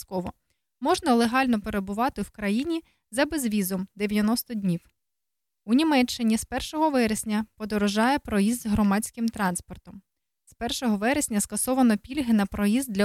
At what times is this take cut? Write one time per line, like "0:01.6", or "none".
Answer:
none